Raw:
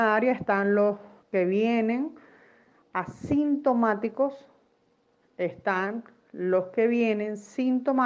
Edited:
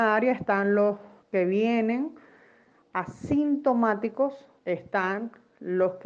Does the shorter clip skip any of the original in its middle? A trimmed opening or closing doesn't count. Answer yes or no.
yes